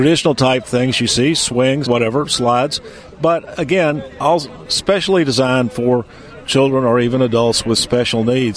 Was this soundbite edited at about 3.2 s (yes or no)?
no